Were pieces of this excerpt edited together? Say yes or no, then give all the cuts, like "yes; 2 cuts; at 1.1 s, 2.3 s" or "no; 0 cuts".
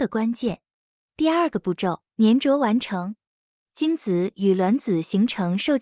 yes; 2 cuts; at 1.0 s, 2.1 s